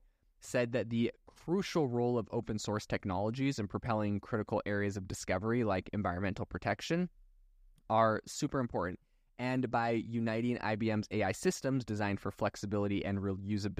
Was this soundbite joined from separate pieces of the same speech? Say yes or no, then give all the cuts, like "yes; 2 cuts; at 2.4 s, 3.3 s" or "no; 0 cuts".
no; 0 cuts